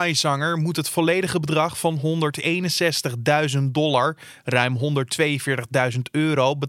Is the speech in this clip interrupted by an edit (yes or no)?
no